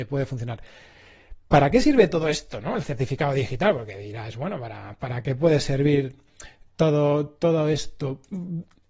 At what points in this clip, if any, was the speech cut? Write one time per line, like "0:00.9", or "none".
none